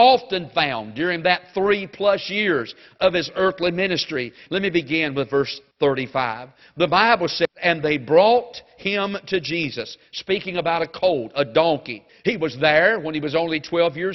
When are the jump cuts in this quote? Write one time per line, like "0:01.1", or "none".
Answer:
0:04.5
0:12.1